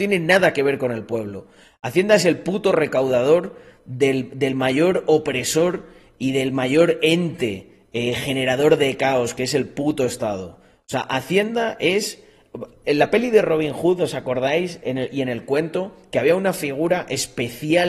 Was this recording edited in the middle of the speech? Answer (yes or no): no